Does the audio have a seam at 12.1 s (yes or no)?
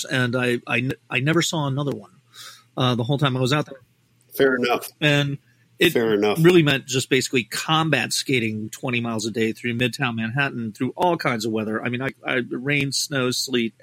no